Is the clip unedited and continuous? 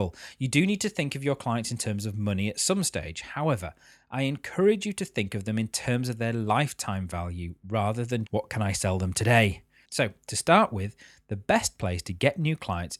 no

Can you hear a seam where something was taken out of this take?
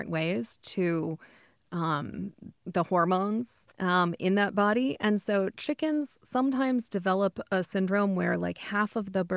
yes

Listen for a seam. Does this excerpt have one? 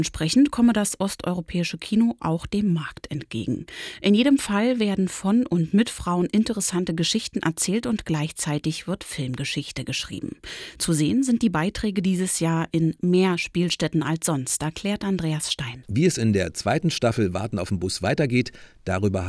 yes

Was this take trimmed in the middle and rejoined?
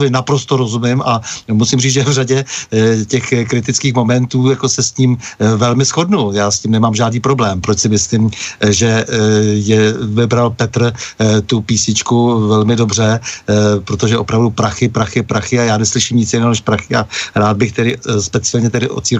yes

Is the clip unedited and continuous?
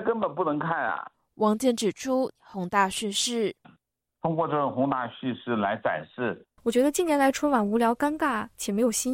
no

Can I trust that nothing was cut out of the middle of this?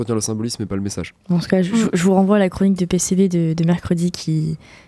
no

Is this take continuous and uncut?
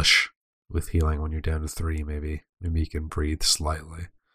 no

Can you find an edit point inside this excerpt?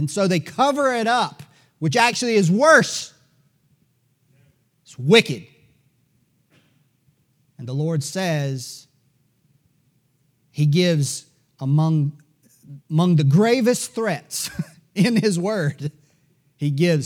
yes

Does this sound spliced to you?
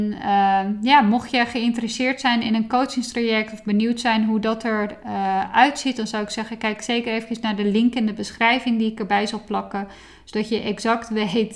no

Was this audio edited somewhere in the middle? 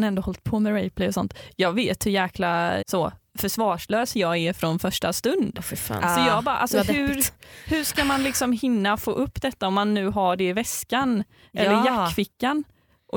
yes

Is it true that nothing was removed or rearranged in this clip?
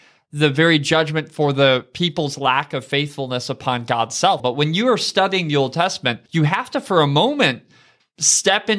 no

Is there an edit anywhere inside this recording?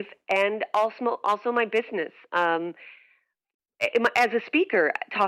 no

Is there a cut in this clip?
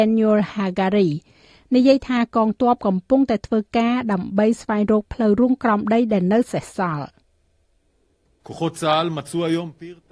no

